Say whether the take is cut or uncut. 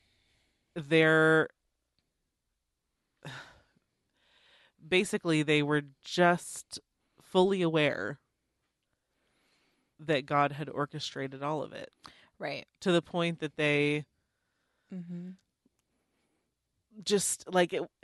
uncut